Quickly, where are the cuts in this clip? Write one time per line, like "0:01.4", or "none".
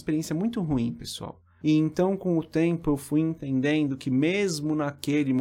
0:01.6